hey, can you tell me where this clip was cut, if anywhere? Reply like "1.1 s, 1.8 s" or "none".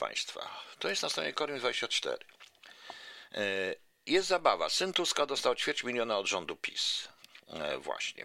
none